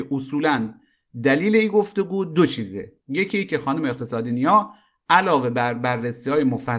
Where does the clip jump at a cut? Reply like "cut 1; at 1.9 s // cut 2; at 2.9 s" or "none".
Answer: cut 1; at 3.0 s

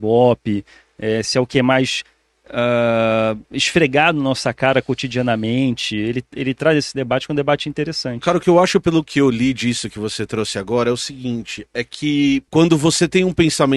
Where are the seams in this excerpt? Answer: cut 1; at 12.5 s

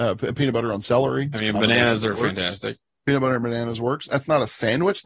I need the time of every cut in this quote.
cut 1; at 1.3 s

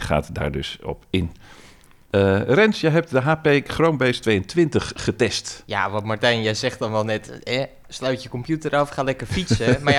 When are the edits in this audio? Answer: none

